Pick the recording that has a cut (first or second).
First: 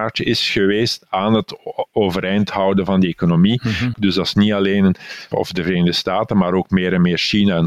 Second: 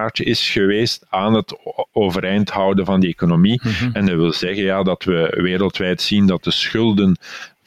first